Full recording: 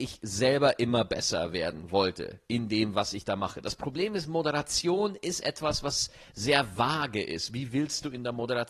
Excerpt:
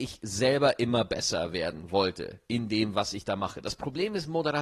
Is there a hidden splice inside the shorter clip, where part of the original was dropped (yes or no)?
no